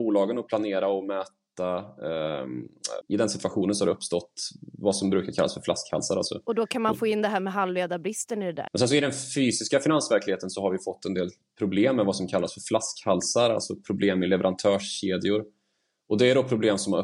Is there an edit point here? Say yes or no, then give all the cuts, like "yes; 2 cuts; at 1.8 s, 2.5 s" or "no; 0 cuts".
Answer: yes; 2 cuts; at 3.0 s, 8.7 s